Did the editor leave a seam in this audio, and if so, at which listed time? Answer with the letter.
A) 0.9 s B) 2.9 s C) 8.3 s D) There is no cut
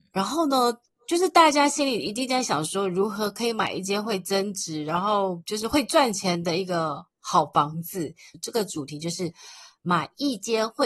C